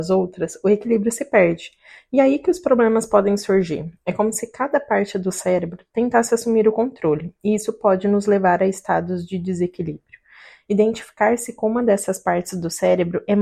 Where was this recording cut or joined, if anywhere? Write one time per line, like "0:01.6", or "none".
none